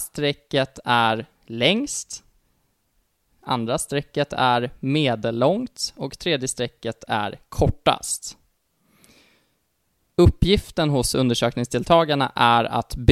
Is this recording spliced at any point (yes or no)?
no